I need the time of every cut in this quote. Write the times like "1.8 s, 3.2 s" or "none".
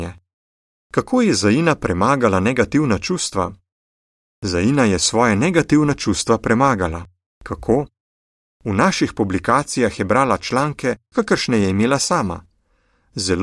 11.1 s